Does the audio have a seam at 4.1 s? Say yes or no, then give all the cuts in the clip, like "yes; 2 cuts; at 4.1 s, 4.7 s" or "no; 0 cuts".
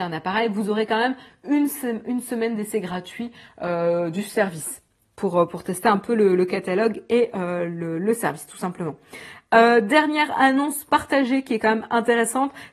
no; 0 cuts